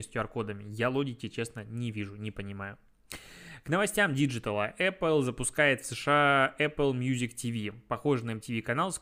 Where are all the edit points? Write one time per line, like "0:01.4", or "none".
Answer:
none